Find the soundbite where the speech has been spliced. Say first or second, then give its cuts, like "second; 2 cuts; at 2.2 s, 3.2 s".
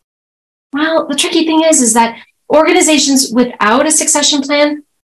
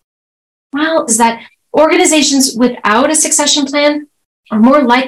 second; 1 cut; at 1.1 s